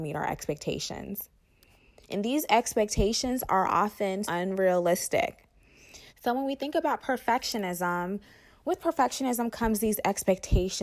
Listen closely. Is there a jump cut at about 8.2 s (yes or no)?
no